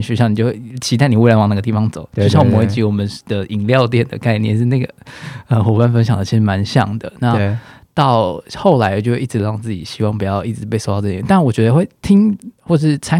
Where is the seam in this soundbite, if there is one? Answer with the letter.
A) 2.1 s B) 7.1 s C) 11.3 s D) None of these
D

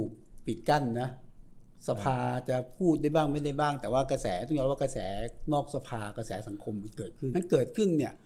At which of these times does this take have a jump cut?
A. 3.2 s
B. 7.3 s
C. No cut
B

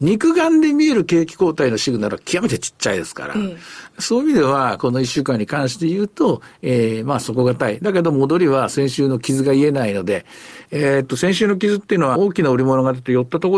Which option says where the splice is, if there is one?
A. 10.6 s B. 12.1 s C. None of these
B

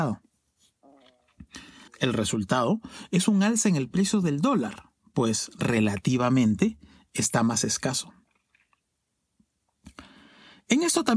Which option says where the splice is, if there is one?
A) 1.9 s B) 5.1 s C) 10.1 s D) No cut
A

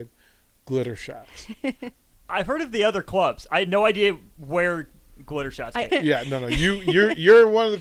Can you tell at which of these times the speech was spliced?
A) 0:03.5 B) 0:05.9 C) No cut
B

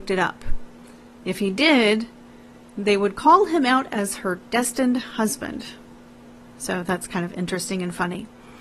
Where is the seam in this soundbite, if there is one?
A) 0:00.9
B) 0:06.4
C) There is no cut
C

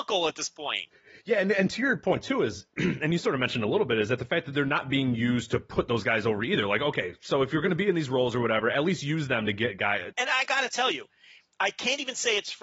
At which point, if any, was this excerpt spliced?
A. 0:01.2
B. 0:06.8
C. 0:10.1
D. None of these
C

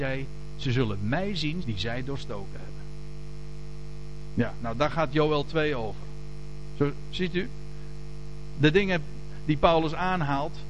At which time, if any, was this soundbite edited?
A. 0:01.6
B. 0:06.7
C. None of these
A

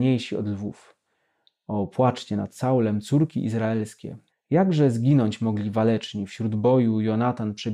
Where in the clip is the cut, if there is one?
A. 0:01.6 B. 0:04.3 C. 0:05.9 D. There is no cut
B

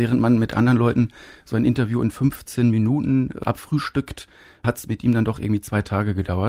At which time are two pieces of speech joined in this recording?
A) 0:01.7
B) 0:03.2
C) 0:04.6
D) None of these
D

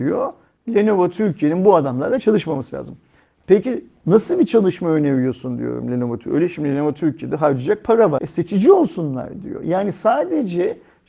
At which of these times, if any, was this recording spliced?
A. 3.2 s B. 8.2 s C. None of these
B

